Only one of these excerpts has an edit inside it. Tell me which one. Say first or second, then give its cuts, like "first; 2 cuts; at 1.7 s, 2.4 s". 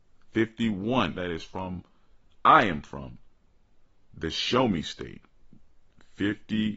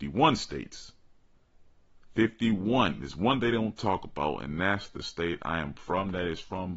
first; 1 cut; at 1.1 s